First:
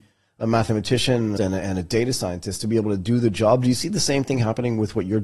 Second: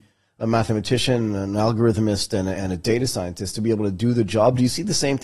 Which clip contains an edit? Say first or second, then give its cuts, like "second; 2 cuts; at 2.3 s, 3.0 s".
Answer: first; 1 cut; at 1.4 s